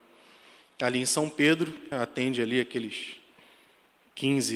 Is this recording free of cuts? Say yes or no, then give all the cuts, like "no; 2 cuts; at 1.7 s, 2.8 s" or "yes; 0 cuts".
no; 1 cut; at 1.9 s